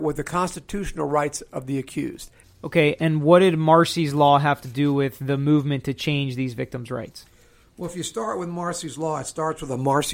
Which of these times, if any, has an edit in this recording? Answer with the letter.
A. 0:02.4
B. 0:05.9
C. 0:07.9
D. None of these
A